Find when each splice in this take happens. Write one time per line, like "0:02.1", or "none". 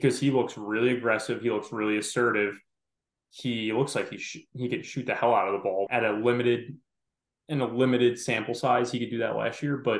0:05.9